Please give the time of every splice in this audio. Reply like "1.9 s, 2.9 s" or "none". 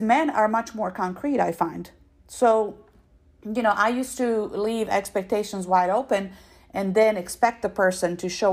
none